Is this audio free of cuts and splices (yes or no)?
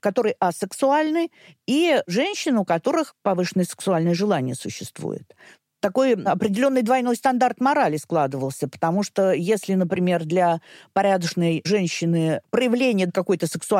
yes